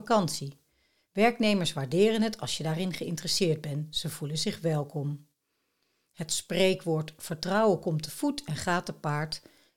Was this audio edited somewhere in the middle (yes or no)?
no